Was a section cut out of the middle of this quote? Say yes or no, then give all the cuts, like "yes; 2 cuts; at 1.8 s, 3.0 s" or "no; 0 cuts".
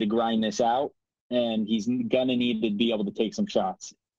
no; 0 cuts